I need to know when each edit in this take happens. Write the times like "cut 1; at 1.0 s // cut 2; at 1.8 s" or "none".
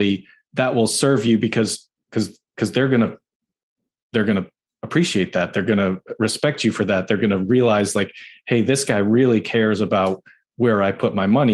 none